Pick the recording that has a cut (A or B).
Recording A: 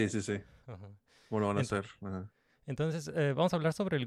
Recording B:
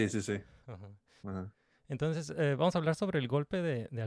B